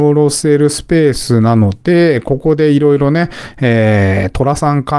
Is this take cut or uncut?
uncut